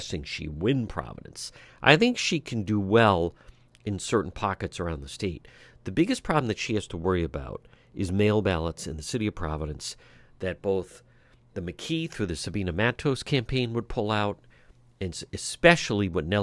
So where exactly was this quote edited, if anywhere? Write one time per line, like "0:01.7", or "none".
none